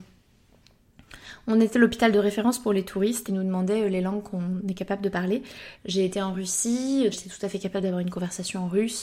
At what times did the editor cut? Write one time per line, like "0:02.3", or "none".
0:03.3
0:05.8
0:07.1